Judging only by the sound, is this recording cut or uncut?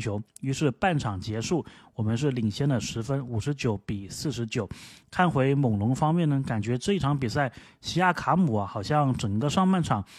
uncut